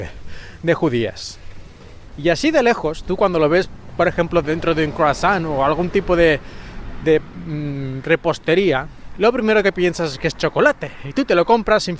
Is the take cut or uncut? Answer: cut